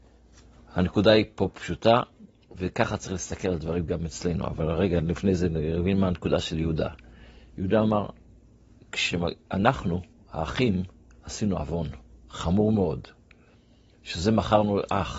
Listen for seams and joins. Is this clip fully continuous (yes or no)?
yes